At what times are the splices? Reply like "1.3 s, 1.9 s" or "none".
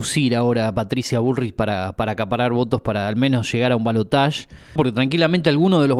4.8 s